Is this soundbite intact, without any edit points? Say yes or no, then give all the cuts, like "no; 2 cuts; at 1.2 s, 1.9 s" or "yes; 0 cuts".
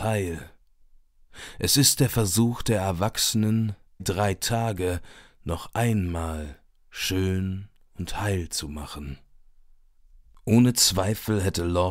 no; 1 cut; at 4.0 s